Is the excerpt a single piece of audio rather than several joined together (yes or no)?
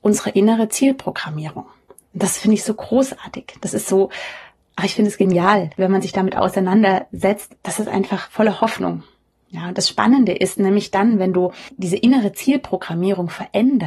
no